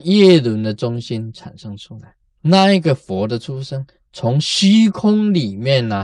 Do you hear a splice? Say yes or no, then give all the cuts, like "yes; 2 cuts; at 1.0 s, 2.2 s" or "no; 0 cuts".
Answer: yes; 1 cut; at 2.2 s